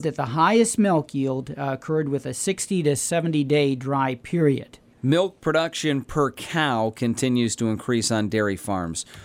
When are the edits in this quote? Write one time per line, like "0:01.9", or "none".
0:04.9